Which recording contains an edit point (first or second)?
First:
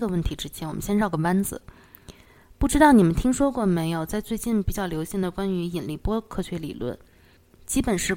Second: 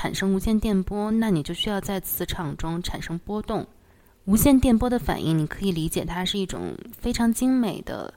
second